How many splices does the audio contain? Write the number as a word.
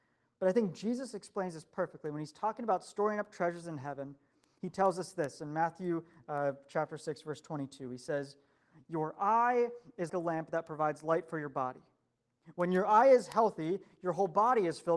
one